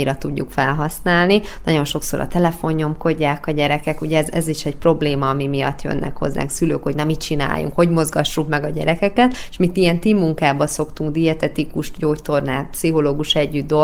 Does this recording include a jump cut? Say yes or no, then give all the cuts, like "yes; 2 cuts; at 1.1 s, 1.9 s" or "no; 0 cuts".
no; 0 cuts